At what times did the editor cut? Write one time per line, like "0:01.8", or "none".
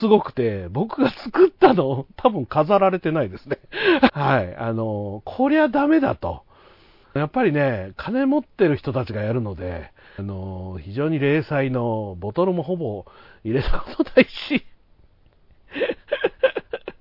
0:04.1
0:07.0
0:10.2

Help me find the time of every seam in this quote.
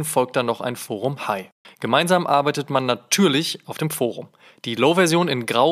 0:01.6

